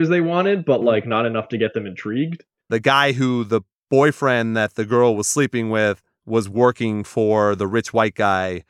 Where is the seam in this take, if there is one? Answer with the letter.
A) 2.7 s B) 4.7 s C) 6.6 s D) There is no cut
A